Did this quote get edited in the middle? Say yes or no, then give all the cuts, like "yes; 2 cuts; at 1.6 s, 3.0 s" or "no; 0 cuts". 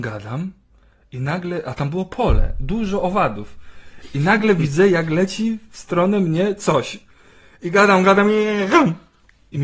no; 0 cuts